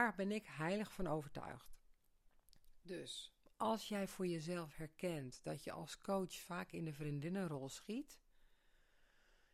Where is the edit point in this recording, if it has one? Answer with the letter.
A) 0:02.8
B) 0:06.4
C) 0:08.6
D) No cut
D